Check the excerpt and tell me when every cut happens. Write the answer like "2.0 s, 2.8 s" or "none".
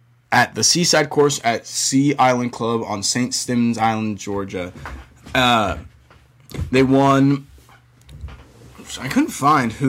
none